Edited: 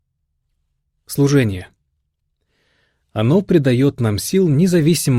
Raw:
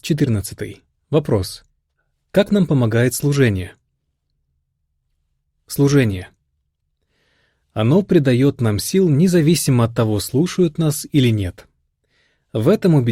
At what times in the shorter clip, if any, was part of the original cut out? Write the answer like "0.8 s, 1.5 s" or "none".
none